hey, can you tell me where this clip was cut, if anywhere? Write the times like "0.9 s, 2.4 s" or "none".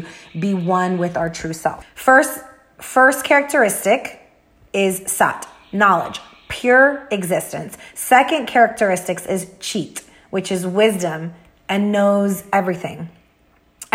1.8 s